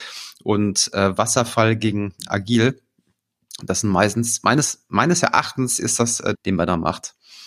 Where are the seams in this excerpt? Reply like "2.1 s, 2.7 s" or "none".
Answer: 6.3 s